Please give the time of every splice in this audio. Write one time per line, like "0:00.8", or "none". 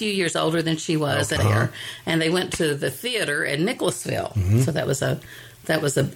0:01.4